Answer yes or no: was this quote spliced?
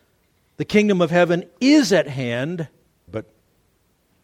yes